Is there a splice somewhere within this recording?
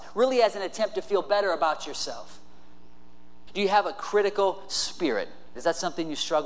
yes; 2 cuts; at 3.5 s, 5.5 s

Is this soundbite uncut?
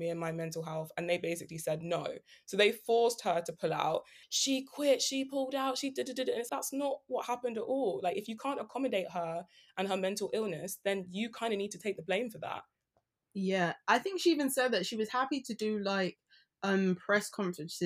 no; 2 cuts; at 4.2 s, 6.5 s

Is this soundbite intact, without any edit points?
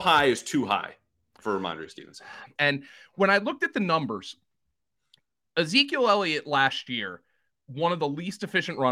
no; 1 cut; at 2.6 s

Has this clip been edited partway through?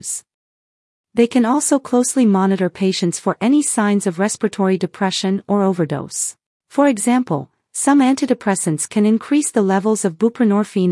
yes; 1 cut; at 6.6 s

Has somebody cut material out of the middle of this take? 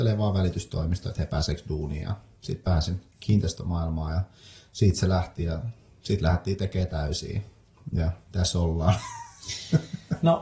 no; 0 cuts

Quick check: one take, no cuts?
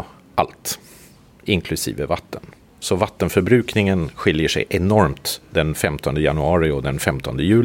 yes; 0 cuts

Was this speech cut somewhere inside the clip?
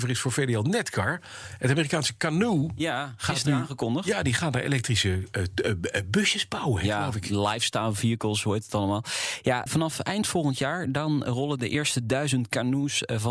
yes; 1 cut; at 9.7 s

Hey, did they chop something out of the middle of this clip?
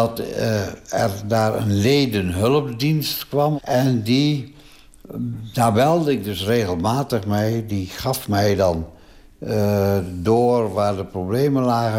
no; 0 cuts

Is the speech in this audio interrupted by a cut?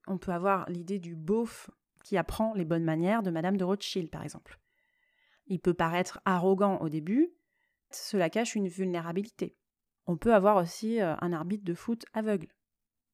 yes; 2 cuts; at 7.9 s, 10.0 s

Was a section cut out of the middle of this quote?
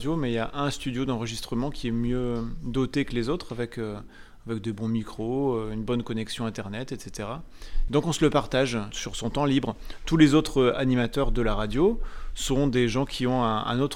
yes; 2 cuts; at 7.9 s, 8.9 s

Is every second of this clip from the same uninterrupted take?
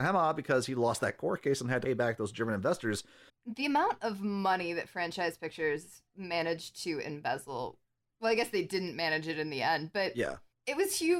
no; 1 cut; at 3.3 s

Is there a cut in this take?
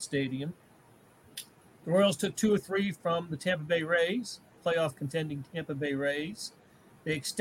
no; 0 cuts

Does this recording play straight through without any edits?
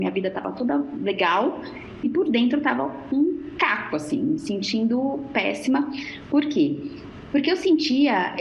yes; 0 cuts

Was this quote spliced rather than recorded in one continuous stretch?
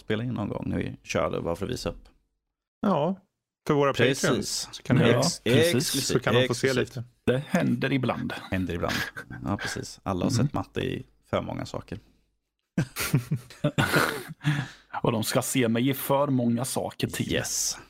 no; 0 cuts

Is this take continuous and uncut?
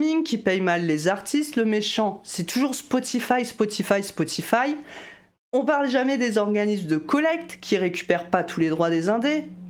yes; 0 cuts

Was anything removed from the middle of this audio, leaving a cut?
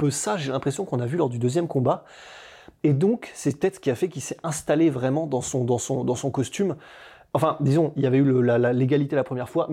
no; 0 cuts

